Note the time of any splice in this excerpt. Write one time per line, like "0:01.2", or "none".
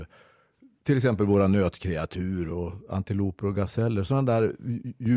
0:02.5